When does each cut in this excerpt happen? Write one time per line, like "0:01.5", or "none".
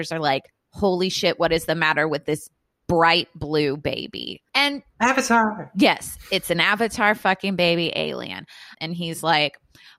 0:04.5
0:08.7